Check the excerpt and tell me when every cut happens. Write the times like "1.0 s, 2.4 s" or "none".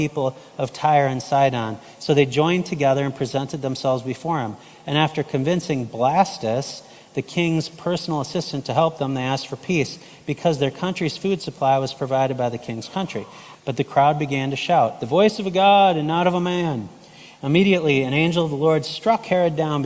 13.5 s